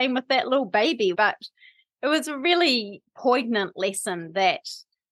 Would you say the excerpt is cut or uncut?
cut